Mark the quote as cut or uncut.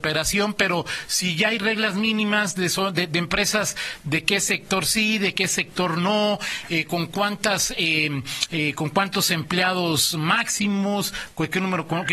uncut